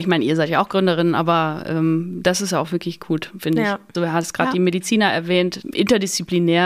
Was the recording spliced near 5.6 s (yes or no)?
yes